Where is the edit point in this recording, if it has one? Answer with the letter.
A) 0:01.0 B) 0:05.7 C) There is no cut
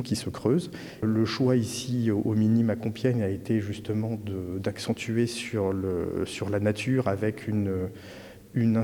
C